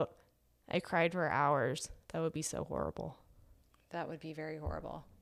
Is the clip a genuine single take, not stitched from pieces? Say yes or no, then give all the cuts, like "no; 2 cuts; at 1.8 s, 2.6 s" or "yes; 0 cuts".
no; 1 cut; at 2.0 s